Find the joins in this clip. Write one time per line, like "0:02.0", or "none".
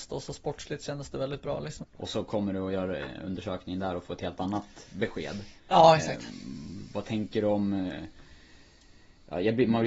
0:01.8